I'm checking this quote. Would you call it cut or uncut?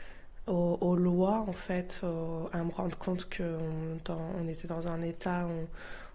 uncut